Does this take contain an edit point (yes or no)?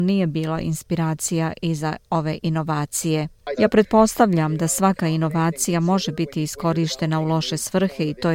yes